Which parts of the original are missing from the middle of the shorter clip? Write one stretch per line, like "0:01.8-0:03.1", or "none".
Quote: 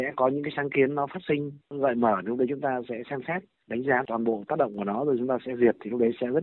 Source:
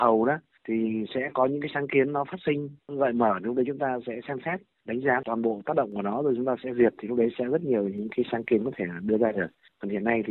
none